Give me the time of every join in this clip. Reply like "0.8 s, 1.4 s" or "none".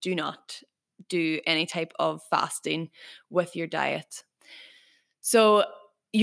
none